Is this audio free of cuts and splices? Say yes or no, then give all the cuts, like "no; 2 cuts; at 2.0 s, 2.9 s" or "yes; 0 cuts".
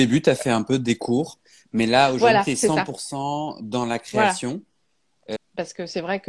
no; 1 cut; at 5.4 s